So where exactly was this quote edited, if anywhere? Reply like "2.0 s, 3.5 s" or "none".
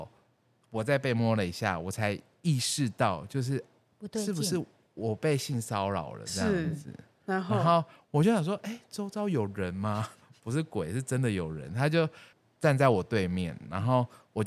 3.9 s